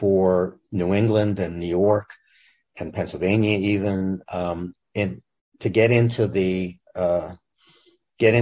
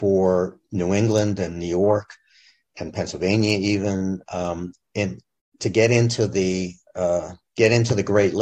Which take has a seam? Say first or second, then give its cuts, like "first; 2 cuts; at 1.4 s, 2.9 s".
second; 1 cut; at 7.4 s